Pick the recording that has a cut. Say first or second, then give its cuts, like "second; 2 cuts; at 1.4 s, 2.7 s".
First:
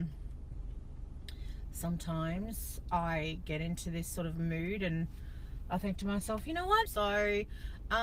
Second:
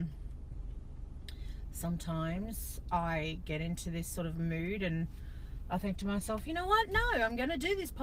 first; 1 cut; at 6.9 s